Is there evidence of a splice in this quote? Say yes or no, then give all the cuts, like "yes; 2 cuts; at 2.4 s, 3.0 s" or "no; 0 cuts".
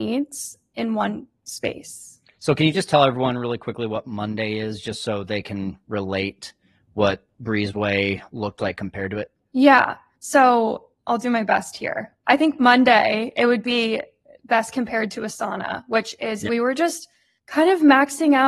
yes; 1 cut; at 16.5 s